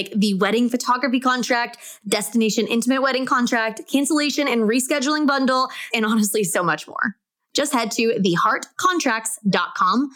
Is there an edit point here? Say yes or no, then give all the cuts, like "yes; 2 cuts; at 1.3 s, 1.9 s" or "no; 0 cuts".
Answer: yes; 1 cut; at 5.9 s